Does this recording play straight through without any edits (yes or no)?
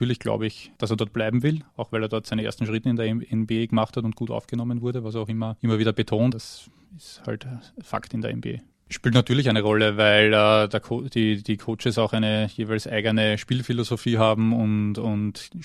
no